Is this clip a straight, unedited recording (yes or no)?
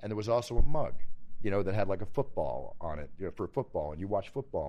yes